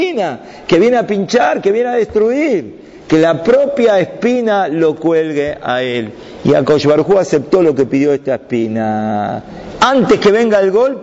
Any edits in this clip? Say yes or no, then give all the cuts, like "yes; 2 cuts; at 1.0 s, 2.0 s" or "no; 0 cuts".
yes; 1 cut; at 9.7 s